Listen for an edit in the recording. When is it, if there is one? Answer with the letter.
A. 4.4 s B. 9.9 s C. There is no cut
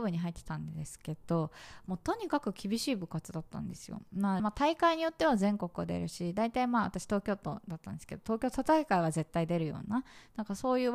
A